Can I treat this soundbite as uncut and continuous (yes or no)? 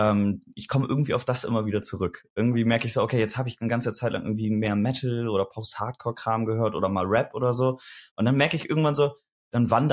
yes